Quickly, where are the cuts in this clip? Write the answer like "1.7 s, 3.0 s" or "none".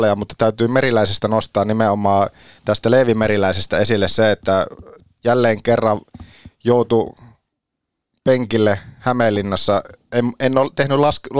none